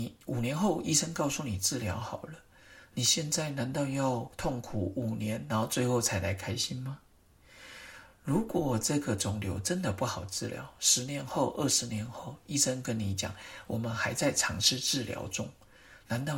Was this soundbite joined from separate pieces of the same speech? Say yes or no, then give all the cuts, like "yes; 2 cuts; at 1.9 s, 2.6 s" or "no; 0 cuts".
no; 0 cuts